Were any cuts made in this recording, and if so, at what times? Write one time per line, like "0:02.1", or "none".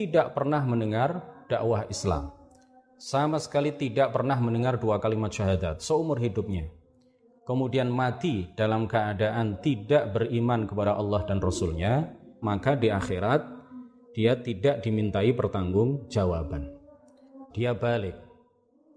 0:12.4
0:17.5